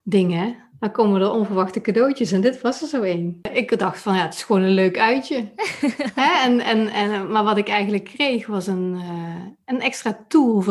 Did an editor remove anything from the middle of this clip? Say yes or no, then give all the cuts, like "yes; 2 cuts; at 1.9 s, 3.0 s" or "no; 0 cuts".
no; 0 cuts